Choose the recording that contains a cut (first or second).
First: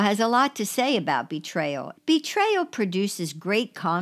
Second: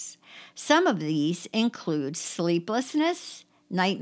first